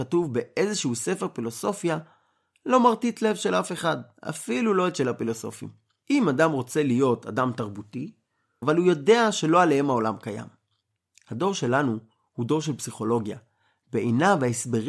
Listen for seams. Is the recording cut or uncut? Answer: cut